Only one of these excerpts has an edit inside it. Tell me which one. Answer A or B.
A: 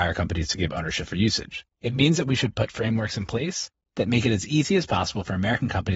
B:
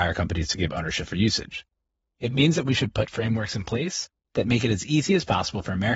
A